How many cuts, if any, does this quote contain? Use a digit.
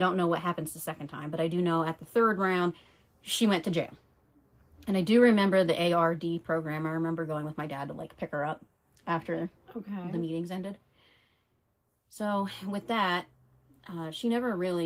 0